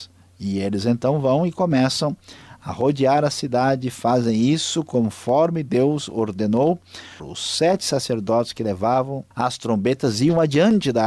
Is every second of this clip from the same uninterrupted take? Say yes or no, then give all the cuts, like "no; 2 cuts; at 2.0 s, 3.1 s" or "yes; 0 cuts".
no; 2 cuts; at 7.2 s, 9.3 s